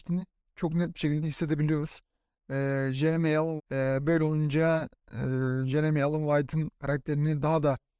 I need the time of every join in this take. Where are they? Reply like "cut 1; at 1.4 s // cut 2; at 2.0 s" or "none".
cut 1; at 3.6 s